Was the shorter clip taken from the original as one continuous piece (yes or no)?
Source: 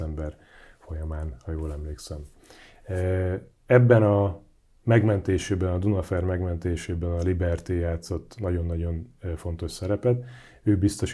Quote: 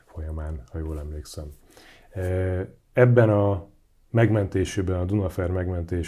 yes